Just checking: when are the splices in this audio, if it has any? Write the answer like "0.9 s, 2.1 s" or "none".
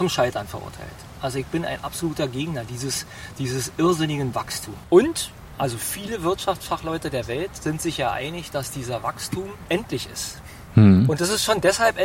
4.8 s, 9.7 s